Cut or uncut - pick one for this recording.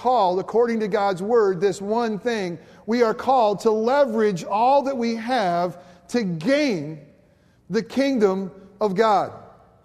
uncut